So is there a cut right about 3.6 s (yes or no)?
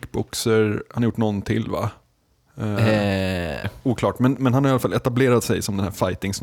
yes